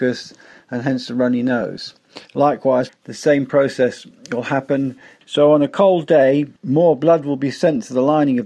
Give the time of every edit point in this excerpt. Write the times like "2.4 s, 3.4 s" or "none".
2.9 s, 5.2 s, 6.6 s